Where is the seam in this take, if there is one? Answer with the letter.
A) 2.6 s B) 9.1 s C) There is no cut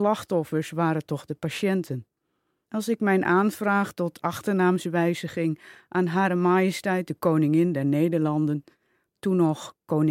A